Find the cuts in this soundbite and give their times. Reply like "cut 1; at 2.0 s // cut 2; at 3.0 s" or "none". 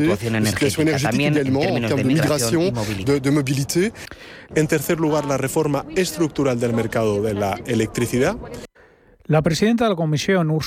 cut 1; at 4.5 s